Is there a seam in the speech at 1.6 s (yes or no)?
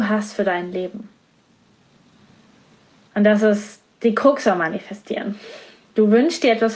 no